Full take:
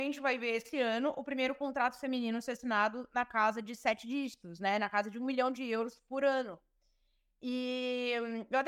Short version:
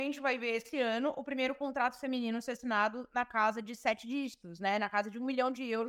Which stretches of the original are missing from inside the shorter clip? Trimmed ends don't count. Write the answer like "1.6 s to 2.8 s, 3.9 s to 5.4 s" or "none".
none